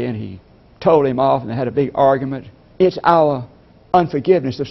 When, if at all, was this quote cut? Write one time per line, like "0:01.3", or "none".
0:02.7